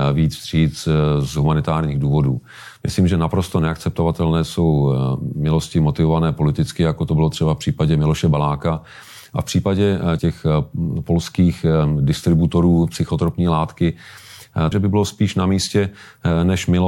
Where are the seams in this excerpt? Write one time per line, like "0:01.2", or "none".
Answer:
0:10.2
0:14.7